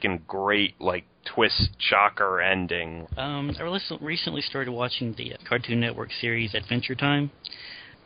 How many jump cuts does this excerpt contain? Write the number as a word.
two